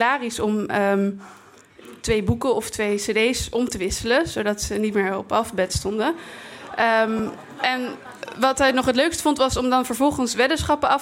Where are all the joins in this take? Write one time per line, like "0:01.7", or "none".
0:02.0